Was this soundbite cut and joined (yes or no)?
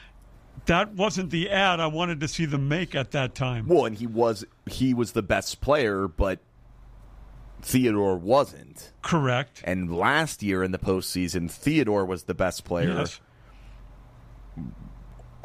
no